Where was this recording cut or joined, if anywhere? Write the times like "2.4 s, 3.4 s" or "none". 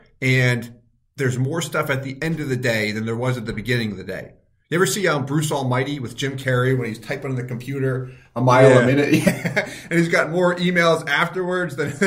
none